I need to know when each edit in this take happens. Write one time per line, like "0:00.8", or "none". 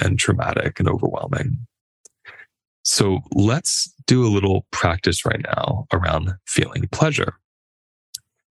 none